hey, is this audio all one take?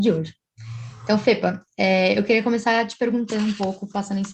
yes; 0 cuts

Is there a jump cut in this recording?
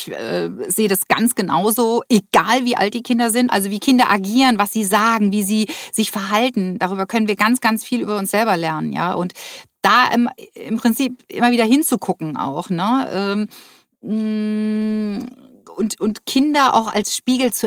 no; 0 cuts

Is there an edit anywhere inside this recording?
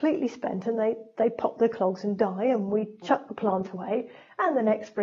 no; 0 cuts

